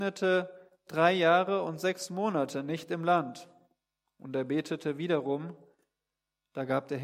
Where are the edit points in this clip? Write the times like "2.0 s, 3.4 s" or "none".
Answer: none